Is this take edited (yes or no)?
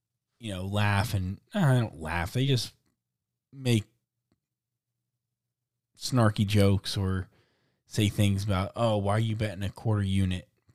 no